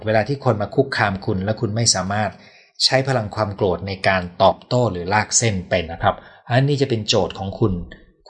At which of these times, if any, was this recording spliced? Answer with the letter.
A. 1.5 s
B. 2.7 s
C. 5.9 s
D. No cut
C